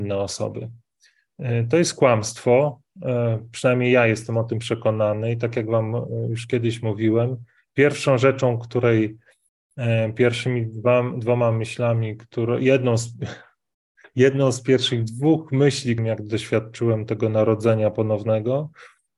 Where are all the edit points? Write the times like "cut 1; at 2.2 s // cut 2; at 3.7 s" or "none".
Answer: cut 1; at 14.0 s // cut 2; at 16.0 s